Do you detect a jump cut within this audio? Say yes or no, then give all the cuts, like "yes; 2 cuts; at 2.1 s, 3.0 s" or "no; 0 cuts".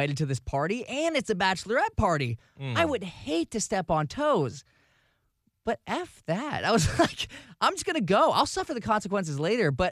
no; 0 cuts